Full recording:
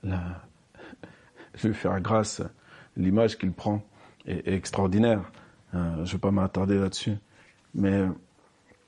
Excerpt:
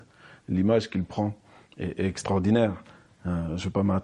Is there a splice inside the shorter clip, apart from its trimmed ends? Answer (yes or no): no